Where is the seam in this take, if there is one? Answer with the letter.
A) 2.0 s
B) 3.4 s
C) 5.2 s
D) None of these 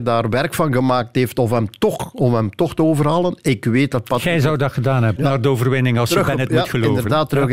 C